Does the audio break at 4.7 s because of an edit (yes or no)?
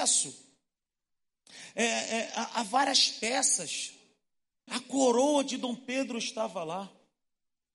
yes